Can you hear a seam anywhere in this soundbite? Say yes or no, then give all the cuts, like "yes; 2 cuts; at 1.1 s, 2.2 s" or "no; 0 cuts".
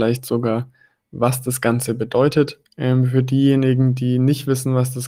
yes; 1 cut; at 2.7 s